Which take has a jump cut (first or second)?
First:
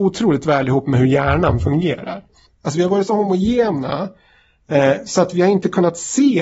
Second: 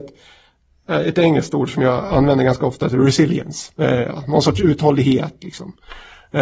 first